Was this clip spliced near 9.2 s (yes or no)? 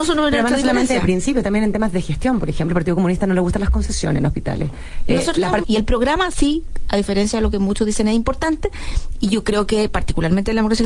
no